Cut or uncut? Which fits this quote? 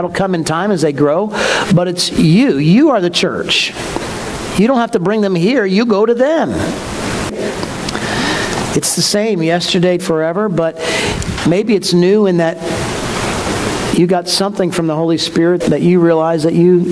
cut